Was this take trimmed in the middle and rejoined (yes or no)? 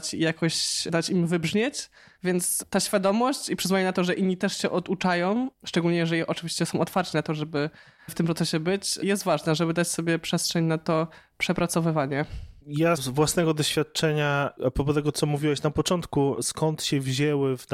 yes